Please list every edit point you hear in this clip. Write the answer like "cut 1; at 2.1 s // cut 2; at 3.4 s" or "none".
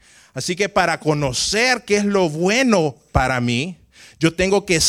none

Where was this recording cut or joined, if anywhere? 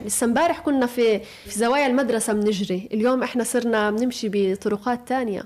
cut 1; at 1.4 s

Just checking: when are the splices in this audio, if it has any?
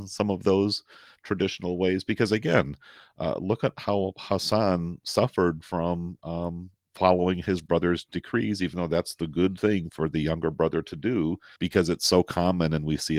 cut 1; at 11.6 s

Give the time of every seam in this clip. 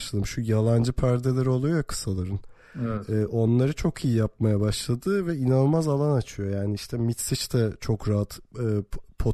none

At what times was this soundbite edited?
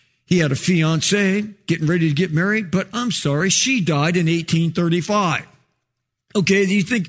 none

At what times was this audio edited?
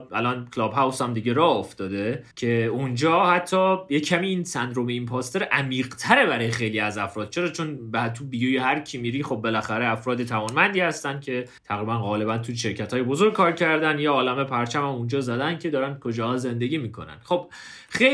cut 1; at 2.3 s // cut 2; at 11.6 s

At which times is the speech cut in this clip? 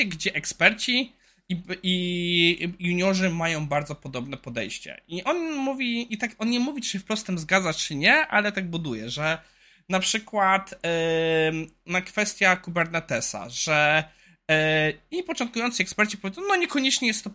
none

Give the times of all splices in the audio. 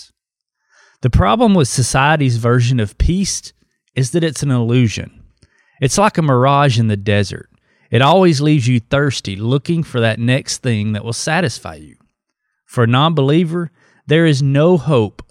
none

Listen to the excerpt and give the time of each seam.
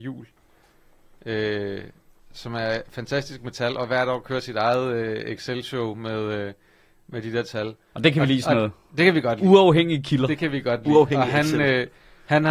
none

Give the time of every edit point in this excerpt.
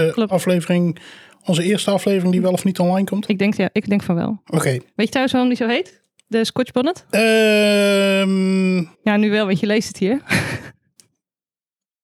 cut 1; at 3.3 s // cut 2; at 8.9 s

